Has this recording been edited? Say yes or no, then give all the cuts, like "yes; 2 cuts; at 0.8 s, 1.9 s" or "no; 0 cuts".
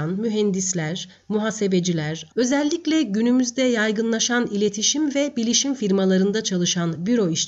yes; 1 cut; at 2.3 s